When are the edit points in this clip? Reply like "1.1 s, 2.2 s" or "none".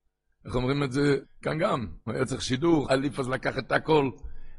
1.2 s, 2.8 s